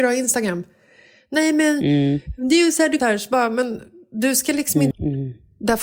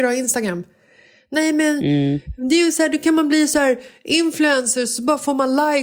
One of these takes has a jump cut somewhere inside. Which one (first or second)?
first